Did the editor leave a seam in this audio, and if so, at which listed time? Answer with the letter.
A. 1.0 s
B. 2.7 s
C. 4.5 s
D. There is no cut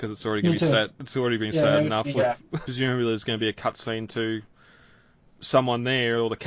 B